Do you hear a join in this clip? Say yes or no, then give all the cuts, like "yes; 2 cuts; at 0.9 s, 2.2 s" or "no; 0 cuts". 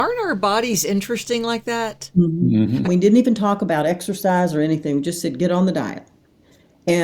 yes; 1 cut; at 2.8 s